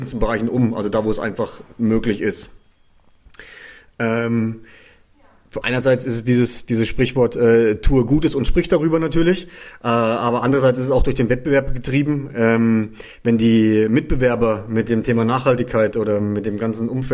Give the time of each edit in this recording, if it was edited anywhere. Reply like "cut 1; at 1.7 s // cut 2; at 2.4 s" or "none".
cut 1; at 5.6 s